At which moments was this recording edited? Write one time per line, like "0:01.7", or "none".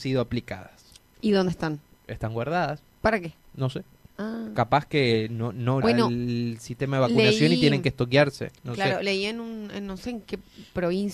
0:05.8